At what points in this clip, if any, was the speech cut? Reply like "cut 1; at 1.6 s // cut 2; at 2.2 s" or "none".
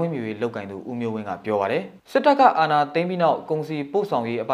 cut 1; at 2.0 s